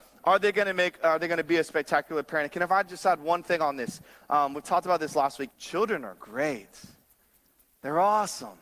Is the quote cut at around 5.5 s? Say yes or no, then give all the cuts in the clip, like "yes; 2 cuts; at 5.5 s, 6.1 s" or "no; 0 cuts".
yes; 1 cut; at 5.5 s